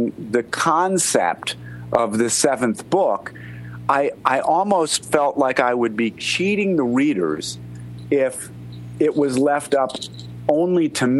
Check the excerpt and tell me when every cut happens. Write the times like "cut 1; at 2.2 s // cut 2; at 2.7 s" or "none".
none